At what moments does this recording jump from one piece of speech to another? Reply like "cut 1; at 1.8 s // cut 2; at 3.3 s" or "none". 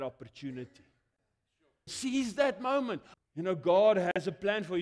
cut 1; at 1.9 s // cut 2; at 3.1 s